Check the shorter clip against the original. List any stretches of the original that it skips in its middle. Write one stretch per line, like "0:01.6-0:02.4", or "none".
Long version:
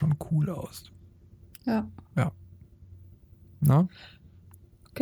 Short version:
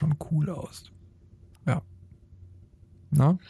0:01.5-0:02.0